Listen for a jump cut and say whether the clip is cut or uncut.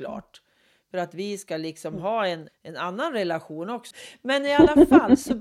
cut